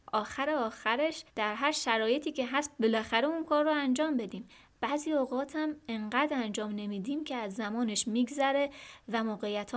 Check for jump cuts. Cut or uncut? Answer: cut